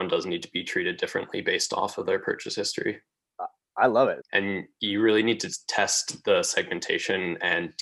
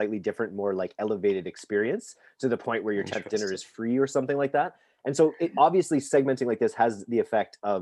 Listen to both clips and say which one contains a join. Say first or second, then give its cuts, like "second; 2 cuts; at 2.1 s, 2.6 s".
first; 1 cut; at 4.2 s